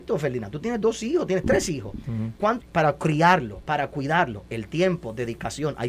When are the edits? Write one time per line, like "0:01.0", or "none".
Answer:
0:02.6